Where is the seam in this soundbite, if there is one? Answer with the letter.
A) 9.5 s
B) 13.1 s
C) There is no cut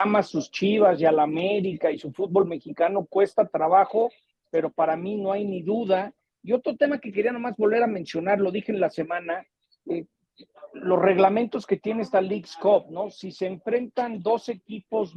C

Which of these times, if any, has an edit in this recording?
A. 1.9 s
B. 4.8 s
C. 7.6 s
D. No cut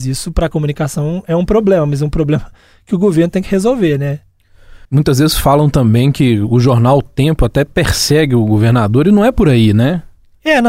B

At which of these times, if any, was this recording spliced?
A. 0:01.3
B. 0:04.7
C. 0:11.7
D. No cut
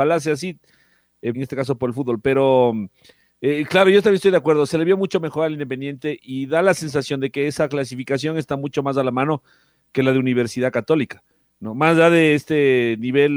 A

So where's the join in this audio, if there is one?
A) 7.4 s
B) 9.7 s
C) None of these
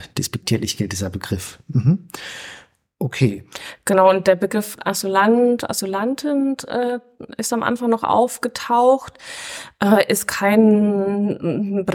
C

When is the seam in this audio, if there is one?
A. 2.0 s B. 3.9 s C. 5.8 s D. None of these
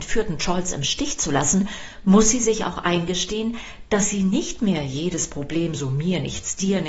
D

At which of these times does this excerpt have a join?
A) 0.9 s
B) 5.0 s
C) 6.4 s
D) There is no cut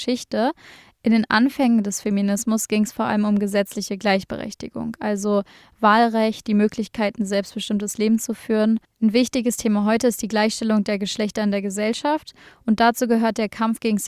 C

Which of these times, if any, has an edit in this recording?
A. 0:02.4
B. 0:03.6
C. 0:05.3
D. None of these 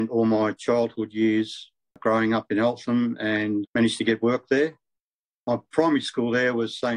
B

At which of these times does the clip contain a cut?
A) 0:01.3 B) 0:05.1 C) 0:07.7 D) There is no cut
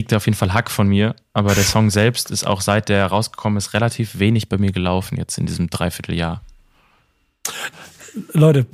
C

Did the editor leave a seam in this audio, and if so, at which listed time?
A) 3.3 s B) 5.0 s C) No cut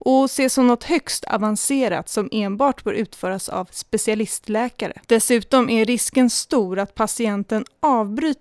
B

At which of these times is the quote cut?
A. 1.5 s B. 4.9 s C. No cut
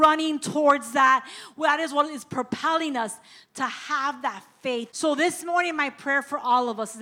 B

